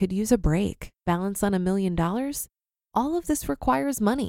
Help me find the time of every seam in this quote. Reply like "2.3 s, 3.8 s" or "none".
1.0 s, 2.8 s